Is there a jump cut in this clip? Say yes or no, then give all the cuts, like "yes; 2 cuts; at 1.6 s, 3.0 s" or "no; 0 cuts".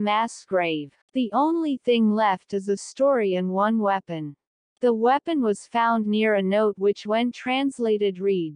yes; 1 cut; at 1.0 s